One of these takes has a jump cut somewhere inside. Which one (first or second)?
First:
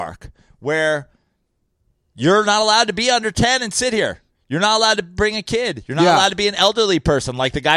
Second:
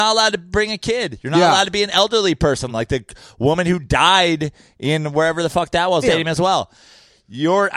second